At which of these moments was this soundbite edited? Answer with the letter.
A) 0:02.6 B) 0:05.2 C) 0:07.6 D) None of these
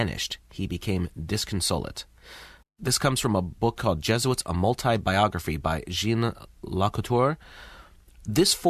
A